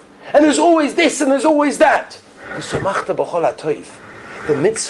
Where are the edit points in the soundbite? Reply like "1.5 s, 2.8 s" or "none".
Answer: none